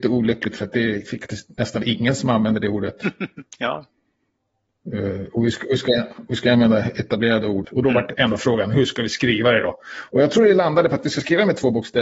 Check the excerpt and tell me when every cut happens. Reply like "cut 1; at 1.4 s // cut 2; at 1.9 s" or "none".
cut 1; at 7.6 s

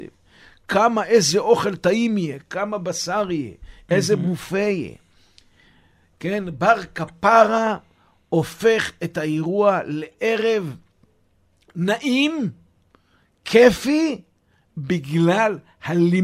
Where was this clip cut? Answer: none

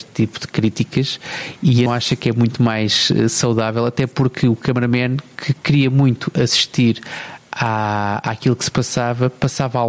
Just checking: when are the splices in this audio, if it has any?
cut 1; at 1.9 s

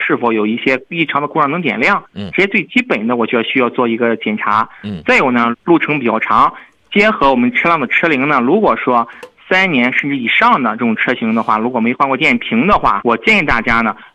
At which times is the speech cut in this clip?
cut 1; at 5.5 s // cut 2; at 13.0 s

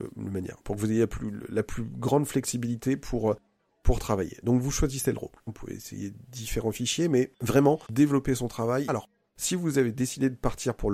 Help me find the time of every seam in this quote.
cut 1; at 5.5 s // cut 2; at 8.9 s

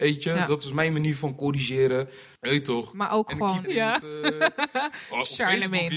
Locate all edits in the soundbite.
cut 1; at 2.4 s // cut 2; at 3.6 s

